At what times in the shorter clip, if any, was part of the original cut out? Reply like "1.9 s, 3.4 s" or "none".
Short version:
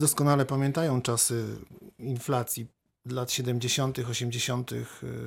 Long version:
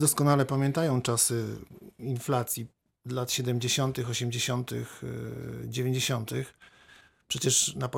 none